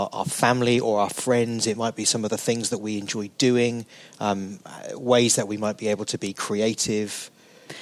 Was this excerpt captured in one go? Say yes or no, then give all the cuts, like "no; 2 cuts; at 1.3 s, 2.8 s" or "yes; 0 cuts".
yes; 0 cuts